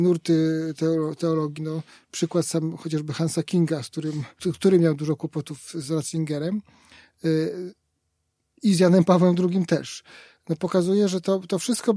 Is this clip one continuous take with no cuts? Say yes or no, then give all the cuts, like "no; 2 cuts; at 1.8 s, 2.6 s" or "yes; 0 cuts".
yes; 0 cuts